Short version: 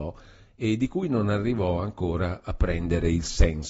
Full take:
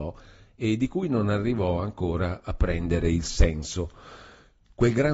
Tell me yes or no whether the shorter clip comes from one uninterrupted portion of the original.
yes